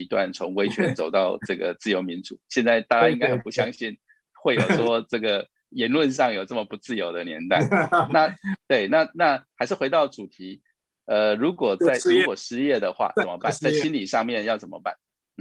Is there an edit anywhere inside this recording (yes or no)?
no